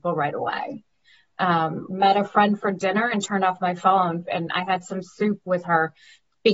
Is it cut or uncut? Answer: cut